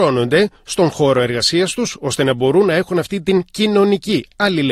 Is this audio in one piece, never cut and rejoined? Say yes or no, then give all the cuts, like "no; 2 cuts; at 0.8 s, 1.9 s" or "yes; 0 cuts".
yes; 0 cuts